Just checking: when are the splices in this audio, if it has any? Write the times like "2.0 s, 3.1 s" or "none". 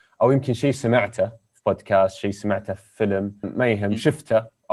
3.4 s